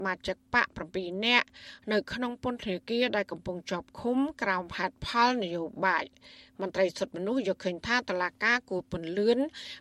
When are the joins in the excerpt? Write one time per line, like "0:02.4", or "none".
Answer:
none